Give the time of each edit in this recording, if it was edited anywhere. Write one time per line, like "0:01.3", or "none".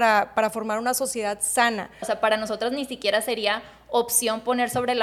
0:02.0